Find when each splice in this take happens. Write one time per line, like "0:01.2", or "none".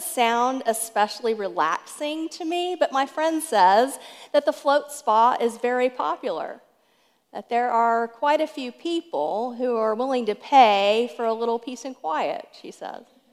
none

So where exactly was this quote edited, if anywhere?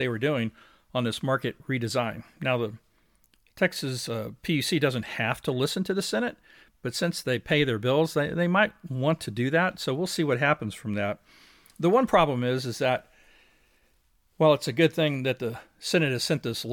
none

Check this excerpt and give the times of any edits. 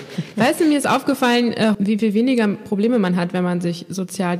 0:01.7

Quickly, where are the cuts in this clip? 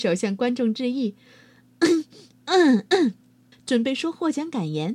0:03.5

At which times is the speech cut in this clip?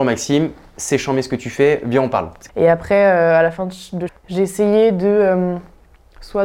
0:02.5
0:04.1

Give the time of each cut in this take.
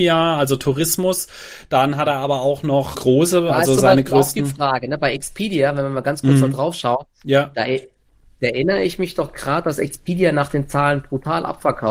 0:02.9

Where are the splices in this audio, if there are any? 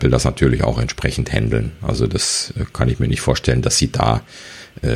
none

